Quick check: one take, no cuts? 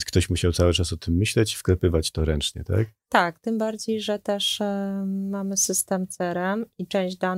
yes; 0 cuts

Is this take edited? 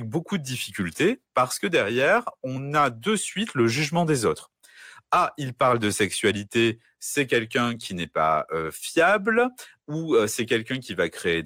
no; 0 cuts

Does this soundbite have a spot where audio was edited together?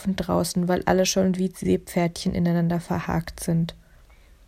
no; 0 cuts

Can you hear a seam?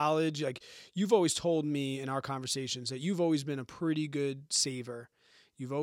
no; 0 cuts

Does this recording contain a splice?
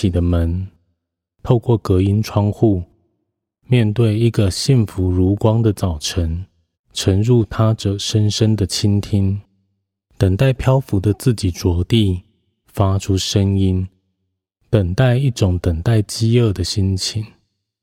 yes; 1 cut; at 6.7 s

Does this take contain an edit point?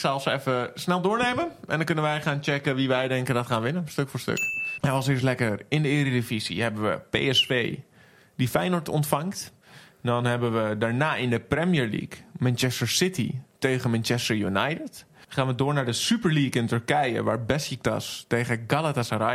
yes; 1 cut; at 4.8 s

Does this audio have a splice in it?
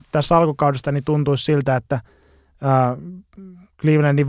no; 0 cuts

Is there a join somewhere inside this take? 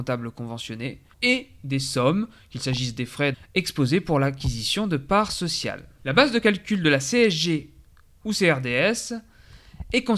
yes; 2 cuts; at 1.1 s, 3.3 s

